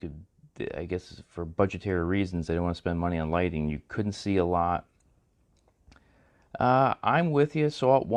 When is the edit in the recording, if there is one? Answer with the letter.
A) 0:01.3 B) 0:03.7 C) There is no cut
C